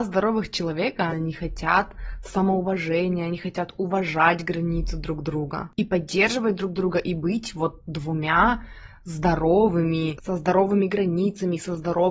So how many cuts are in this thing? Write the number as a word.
two